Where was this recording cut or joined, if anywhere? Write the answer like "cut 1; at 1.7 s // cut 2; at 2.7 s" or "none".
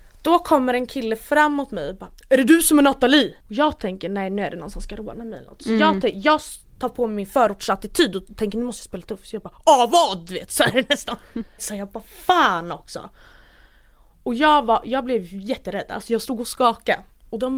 cut 1; at 3.4 s // cut 2; at 11.6 s